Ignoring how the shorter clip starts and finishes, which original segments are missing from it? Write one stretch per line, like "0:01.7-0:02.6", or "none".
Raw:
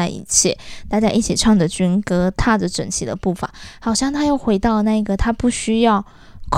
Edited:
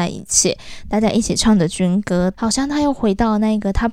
0:02.3-0:03.8